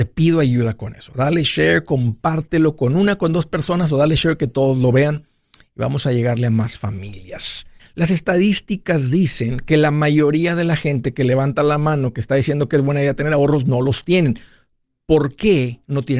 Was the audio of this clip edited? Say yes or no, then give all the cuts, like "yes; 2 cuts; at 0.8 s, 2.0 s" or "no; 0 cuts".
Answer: yes; 1 cut; at 7.8 s